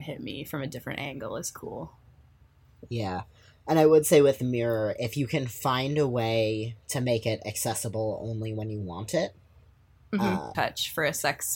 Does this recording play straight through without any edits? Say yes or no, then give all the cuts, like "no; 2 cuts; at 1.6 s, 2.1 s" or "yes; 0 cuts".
no; 1 cut; at 10.5 s